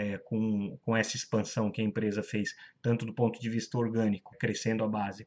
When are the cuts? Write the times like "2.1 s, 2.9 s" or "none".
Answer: 4.3 s